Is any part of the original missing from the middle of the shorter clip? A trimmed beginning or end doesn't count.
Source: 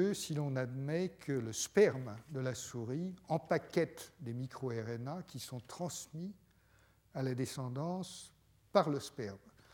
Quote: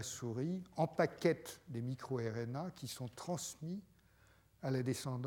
no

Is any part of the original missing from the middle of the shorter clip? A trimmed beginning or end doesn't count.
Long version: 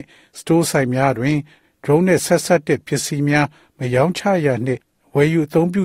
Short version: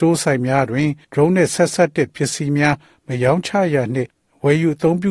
yes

